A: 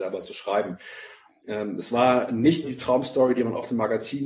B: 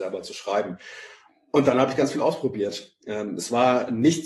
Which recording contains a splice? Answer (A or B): A